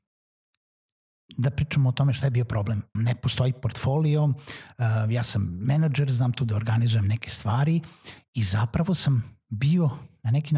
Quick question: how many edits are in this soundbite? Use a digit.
1